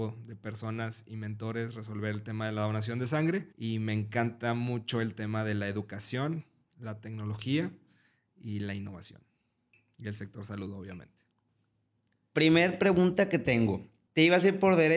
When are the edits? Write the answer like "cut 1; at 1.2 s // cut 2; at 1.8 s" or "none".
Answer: cut 1; at 3.5 s